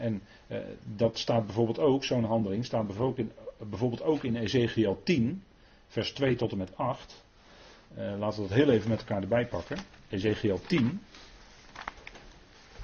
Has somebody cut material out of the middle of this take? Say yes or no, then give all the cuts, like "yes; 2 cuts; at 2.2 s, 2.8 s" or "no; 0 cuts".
no; 0 cuts